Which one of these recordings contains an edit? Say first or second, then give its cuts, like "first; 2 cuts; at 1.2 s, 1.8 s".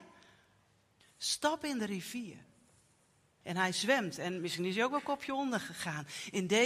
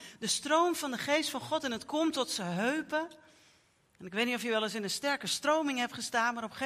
first; 2 cuts; at 1.0 s, 3.4 s